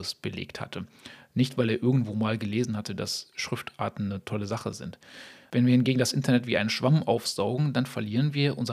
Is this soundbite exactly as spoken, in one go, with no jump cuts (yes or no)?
no